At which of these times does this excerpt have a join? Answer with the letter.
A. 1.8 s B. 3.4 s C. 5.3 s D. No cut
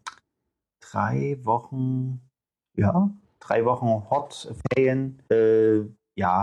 C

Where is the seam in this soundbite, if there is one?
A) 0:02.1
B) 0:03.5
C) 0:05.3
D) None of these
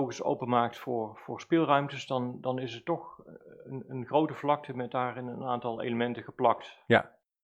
D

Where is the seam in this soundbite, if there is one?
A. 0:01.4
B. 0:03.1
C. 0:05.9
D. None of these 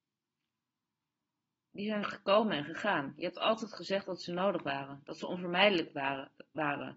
D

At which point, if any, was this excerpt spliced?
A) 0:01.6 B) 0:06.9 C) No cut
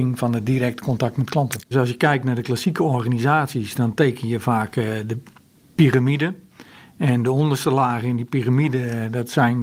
A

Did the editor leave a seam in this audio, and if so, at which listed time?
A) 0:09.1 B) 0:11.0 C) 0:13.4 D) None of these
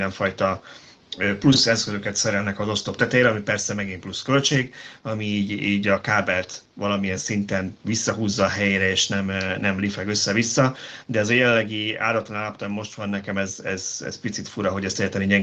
D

